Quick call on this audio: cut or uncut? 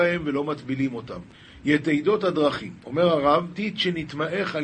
uncut